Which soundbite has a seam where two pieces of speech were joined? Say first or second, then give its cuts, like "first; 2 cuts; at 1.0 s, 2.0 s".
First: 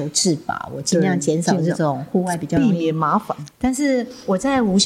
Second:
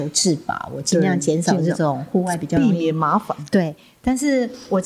first; 1 cut; at 3.5 s